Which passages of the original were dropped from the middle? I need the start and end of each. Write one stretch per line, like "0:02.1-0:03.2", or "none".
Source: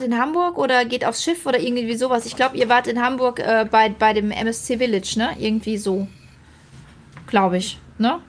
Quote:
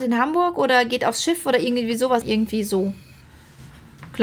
0:02.2-0:05.4